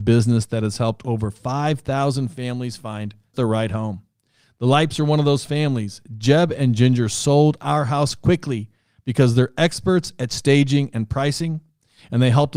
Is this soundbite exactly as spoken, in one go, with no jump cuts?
no; 1 cut; at 3.3 s

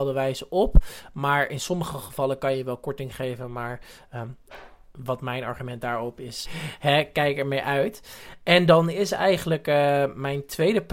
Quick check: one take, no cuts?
no; 1 cut; at 6.4 s

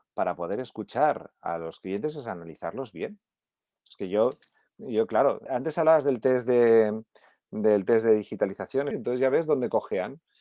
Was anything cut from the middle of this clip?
yes; 2 cuts; at 5.5 s, 8.9 s

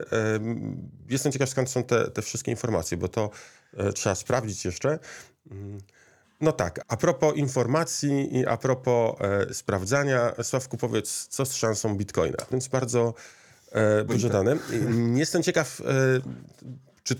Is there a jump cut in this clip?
yes; 3 cuts; at 6.8 s, 12.5 s, 14.1 s

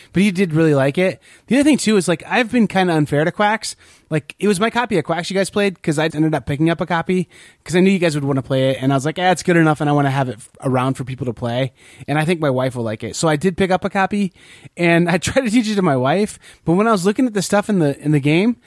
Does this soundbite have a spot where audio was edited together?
yes; 1 cut; at 6.1 s

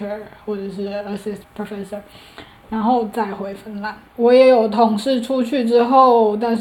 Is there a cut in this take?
yes; 1 cut; at 4.1 s

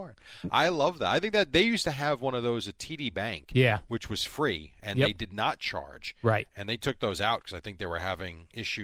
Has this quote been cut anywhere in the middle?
no; 0 cuts

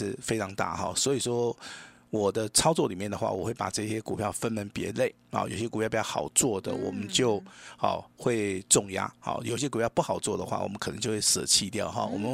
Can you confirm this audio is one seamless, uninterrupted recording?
yes; 0 cuts

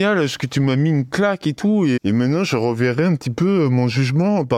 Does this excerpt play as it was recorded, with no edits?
no; 1 cut; at 2.0 s

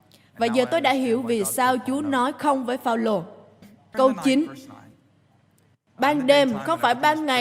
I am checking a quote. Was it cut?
yes; 1 cut; at 3.9 s

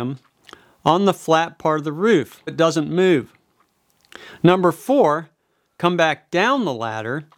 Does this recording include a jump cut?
yes; 1 cut; at 2.5 s

